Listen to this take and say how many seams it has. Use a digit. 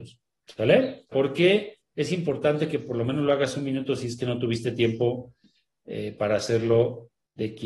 1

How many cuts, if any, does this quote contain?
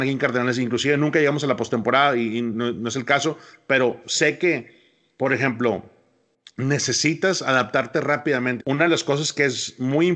1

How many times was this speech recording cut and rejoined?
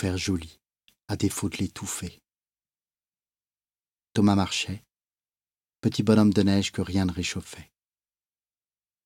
1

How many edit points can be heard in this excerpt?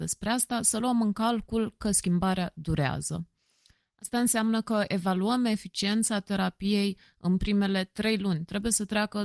0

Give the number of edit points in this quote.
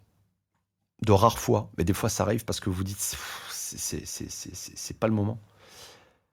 0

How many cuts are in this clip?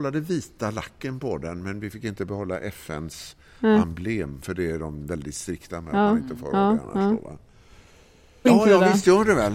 1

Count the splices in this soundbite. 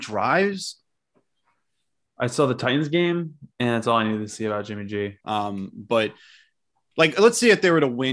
1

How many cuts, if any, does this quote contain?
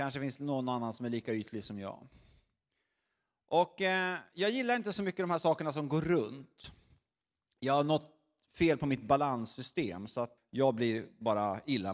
1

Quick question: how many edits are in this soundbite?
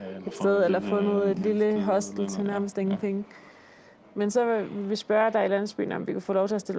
0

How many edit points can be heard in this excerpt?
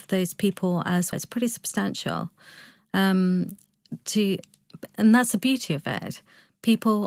1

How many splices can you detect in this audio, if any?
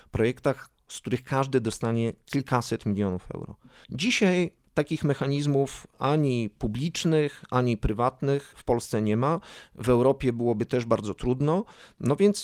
1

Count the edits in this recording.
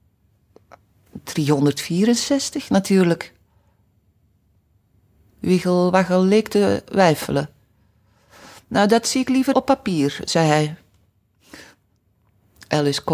1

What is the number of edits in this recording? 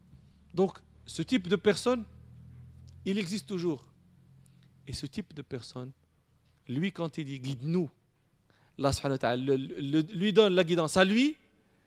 0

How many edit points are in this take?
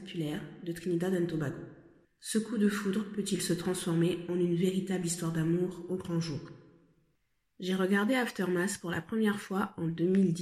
1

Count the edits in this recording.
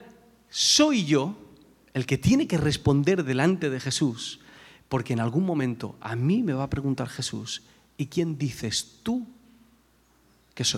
0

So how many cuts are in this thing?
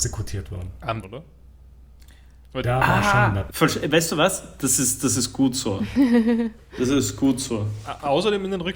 2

